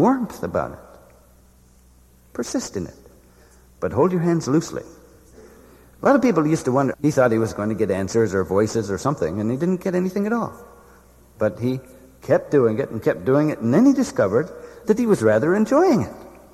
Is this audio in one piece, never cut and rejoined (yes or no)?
no